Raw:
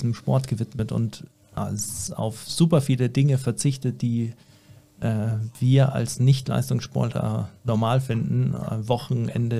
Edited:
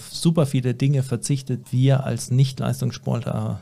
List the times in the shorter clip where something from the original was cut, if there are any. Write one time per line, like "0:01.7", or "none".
0:01.6